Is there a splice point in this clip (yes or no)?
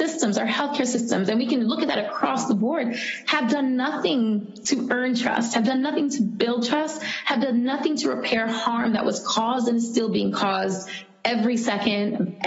no